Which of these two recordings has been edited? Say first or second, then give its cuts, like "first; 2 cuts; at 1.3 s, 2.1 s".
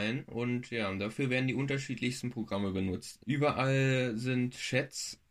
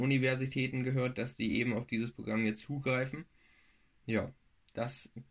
first; 1 cut; at 3.2 s